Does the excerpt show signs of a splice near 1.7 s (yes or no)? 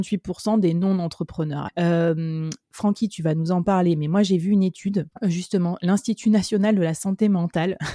yes